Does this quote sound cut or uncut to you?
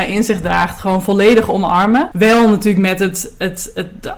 cut